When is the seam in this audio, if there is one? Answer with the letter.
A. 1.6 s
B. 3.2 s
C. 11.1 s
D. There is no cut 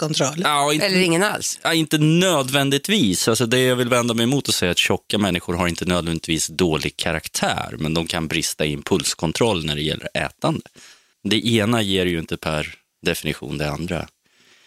C